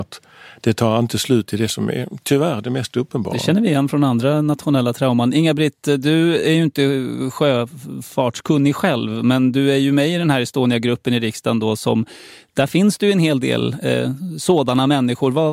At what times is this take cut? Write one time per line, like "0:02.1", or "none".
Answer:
none